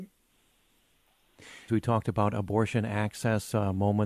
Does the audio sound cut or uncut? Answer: cut